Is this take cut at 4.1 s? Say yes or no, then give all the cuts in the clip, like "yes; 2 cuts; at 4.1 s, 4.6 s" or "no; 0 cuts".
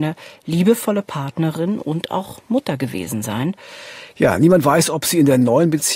yes; 1 cut; at 4.1 s